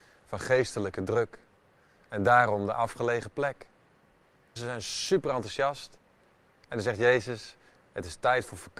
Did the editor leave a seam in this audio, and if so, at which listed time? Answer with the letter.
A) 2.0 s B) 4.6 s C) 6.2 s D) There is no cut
B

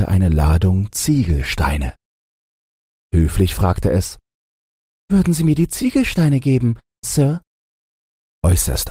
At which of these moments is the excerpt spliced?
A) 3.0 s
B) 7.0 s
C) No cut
B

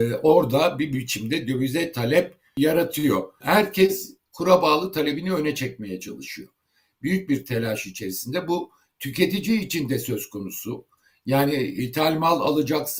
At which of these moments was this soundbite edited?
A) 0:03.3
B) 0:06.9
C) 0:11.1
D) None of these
D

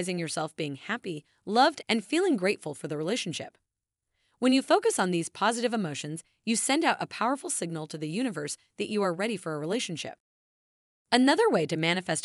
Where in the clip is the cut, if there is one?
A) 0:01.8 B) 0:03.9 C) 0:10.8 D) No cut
A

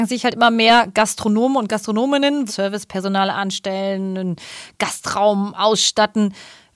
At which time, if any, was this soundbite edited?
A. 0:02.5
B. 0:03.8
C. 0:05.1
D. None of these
A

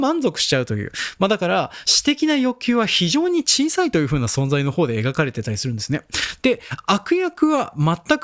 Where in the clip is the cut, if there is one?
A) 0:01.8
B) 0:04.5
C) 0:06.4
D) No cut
A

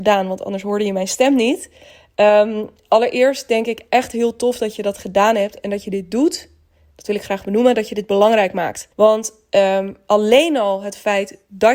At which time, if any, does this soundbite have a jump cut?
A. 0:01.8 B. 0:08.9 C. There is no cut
B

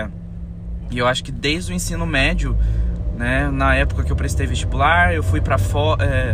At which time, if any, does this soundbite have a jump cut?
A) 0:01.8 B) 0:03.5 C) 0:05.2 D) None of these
D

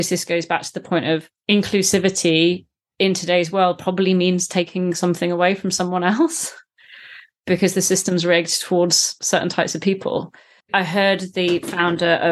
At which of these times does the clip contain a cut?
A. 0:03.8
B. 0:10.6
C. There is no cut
B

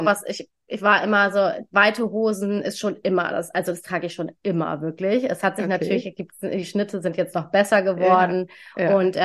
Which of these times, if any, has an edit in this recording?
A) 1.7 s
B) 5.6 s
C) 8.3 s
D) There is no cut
D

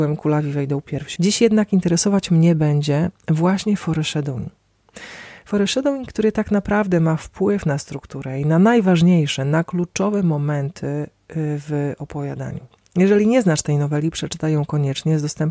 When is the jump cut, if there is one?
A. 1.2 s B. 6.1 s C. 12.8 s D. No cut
A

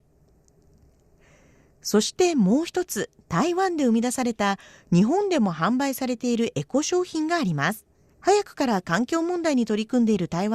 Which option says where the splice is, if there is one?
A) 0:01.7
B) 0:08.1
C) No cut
B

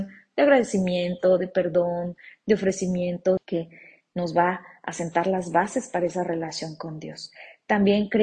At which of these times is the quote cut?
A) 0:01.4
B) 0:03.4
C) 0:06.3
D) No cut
B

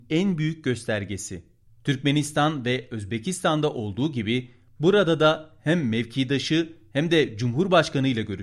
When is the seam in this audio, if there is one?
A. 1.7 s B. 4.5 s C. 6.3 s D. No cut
A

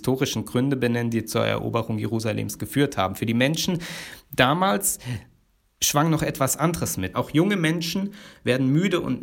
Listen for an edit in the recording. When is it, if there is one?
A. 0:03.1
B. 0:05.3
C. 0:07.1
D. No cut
C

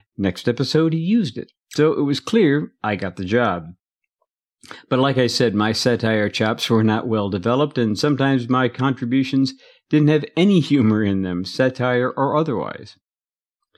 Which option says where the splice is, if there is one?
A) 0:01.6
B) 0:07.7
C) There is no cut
A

